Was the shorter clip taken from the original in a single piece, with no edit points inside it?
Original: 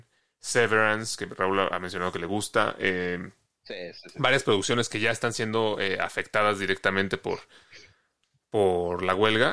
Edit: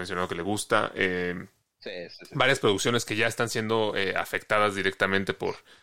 yes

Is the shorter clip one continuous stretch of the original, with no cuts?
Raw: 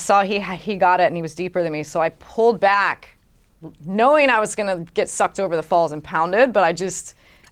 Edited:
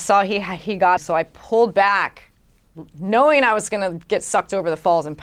no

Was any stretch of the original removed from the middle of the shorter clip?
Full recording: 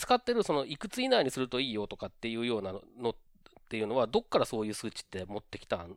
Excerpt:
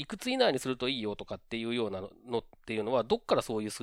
yes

